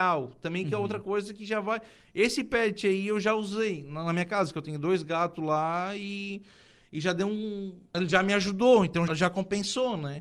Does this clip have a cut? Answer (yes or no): yes